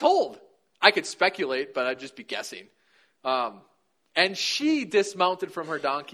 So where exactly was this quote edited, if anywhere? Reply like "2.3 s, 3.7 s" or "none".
none